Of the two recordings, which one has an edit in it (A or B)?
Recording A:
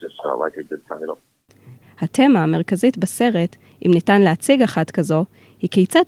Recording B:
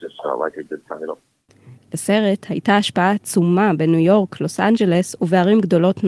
A